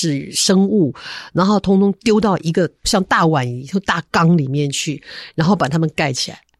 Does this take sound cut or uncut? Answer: uncut